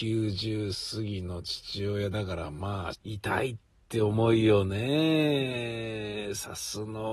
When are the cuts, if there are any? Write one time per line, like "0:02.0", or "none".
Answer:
0:02.9